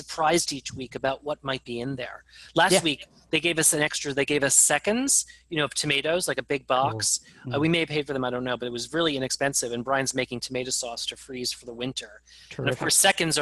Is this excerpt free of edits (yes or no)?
yes